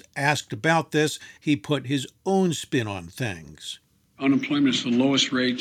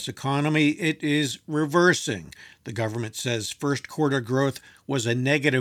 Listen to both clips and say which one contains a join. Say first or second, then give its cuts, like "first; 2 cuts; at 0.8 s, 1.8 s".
first; 1 cut; at 1.4 s